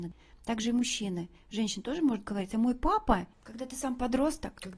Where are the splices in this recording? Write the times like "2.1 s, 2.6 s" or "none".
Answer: 3.3 s